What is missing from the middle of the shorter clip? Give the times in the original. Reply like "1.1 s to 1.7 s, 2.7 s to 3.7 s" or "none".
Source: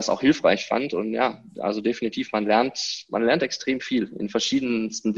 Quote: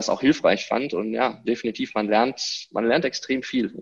1.4 s to 1.8 s